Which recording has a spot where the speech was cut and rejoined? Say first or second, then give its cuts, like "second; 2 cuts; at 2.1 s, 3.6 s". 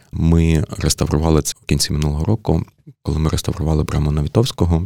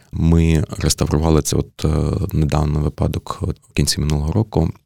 first; 1 cut; at 1.5 s